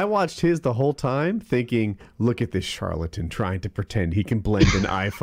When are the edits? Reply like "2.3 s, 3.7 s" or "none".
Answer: none

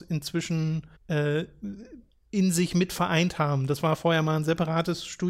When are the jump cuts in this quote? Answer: 1.0 s

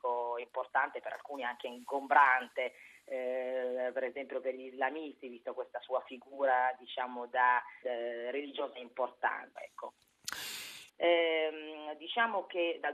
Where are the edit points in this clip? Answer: 7.8 s, 9.6 s, 10.9 s

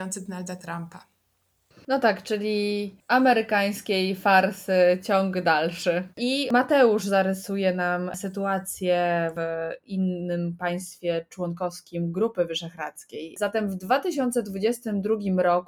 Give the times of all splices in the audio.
6.1 s

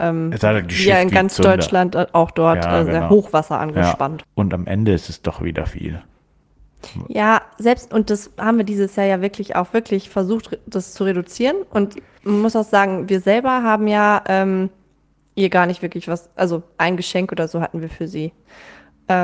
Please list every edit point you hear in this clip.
4.2 s

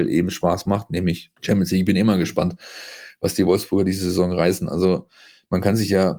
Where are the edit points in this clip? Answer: 1.4 s

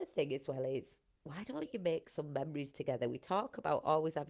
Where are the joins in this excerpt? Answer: none

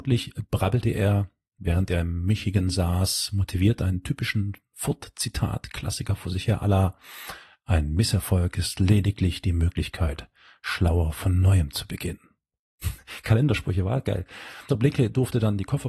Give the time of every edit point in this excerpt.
13.0 s, 14.7 s

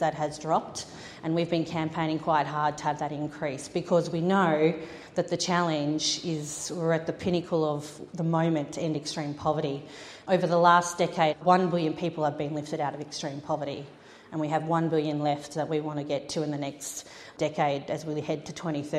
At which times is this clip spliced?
none

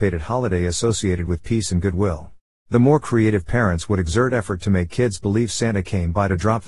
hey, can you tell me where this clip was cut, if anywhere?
2.5 s

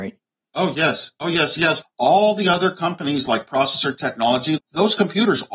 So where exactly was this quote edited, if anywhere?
1.8 s, 4.6 s

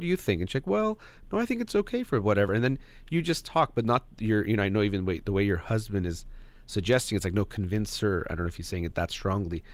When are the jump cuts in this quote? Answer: none

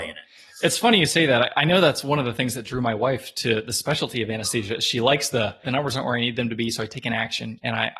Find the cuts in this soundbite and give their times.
5.6 s

